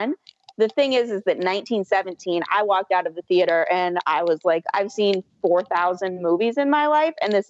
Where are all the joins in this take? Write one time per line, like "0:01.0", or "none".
none